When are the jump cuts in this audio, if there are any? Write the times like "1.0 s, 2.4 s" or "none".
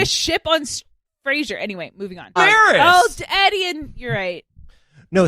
2.4 s